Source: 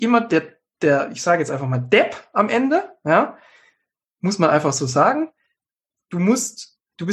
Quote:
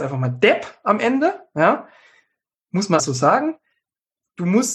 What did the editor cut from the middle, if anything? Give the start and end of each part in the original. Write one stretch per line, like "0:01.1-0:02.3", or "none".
0:04.5-0:04.7